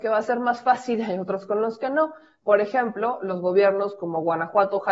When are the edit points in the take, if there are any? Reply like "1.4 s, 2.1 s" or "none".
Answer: none